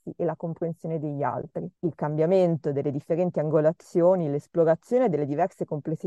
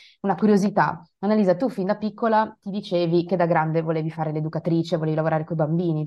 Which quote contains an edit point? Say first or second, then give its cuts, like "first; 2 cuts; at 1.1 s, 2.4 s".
first; 1 cut; at 1.8 s